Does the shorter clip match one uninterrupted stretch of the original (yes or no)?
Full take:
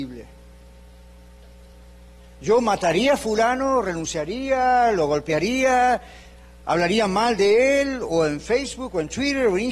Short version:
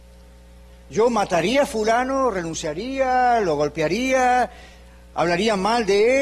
yes